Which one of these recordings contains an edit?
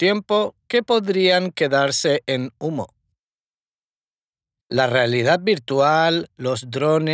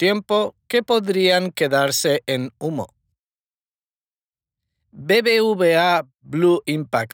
first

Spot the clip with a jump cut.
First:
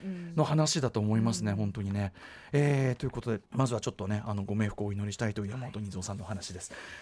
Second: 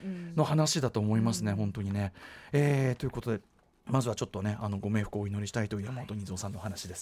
first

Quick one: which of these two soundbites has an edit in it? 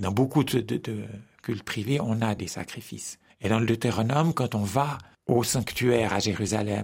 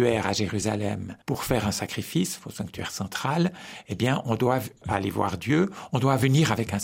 second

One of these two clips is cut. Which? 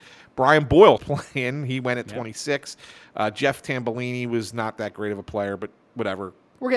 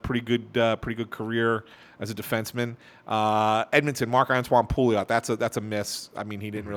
first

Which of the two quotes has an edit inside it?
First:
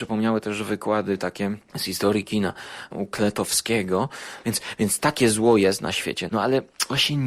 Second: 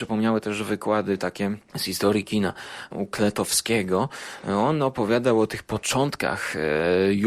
first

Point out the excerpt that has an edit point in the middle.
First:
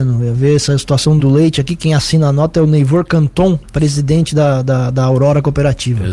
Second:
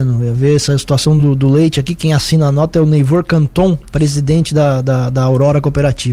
first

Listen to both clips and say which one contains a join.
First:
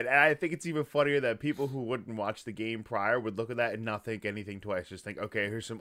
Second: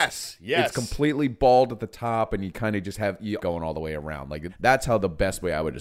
second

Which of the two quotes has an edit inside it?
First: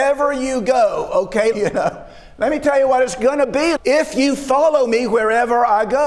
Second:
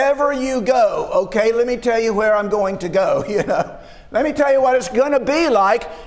first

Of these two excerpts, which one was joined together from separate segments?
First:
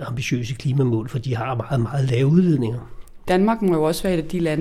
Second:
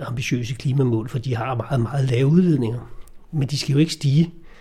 first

